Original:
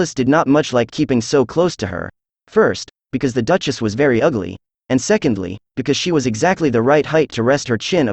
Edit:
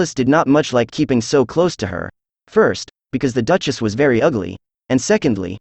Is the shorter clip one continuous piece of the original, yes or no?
yes